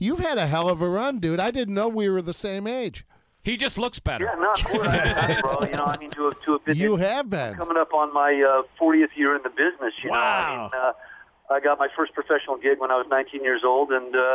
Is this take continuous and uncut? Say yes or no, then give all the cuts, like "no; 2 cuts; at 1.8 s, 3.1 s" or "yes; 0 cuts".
no; 1 cut; at 5.4 s